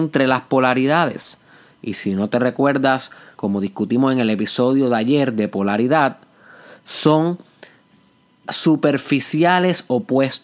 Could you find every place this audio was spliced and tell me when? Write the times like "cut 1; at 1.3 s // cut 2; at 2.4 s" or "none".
cut 1; at 3.3 s